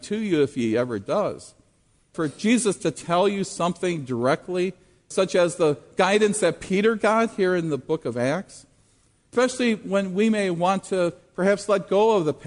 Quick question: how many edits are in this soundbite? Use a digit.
1